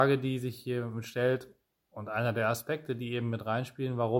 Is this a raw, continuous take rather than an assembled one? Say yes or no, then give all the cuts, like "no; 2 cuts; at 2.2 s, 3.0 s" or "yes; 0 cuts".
yes; 0 cuts